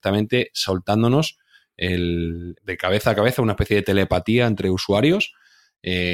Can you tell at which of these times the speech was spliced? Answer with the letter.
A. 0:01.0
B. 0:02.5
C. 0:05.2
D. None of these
B